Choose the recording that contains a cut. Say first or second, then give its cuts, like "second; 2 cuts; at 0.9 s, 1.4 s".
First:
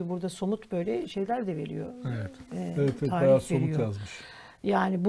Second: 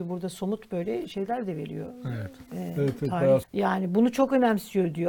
second; 1 cut; at 3.4 s